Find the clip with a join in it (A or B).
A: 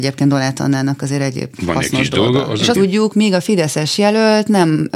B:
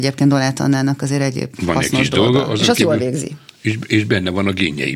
A